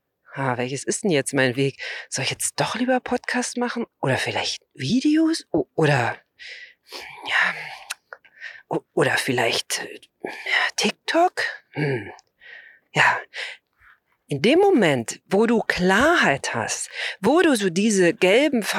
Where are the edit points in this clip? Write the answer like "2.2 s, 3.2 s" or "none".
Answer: 3.9 s